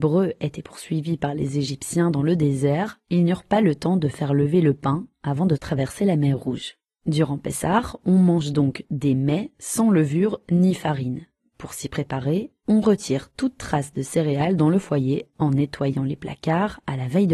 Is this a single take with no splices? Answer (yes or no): yes